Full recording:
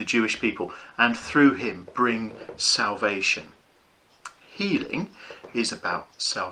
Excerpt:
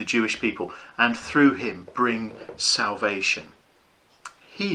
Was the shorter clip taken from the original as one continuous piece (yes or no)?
yes